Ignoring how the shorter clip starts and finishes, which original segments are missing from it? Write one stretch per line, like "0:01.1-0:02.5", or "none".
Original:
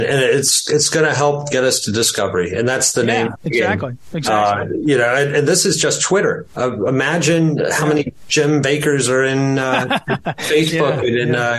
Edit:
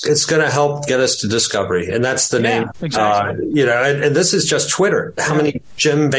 0:03.4-0:04.1
0:06.5-0:07.7